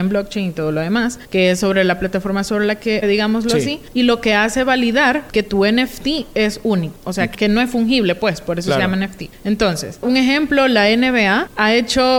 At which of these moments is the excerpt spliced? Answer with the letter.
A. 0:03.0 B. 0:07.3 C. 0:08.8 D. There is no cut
A